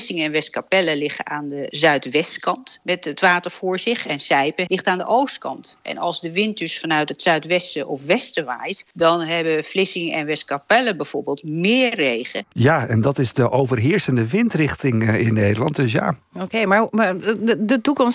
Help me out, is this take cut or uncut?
cut